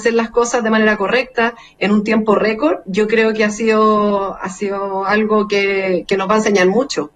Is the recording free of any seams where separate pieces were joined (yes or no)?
no